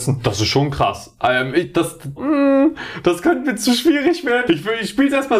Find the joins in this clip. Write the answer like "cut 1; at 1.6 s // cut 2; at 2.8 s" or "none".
cut 1; at 2.2 s // cut 2; at 4.5 s